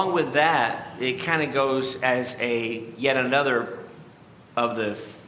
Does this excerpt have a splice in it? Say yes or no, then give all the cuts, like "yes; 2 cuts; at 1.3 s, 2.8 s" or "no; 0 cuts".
no; 0 cuts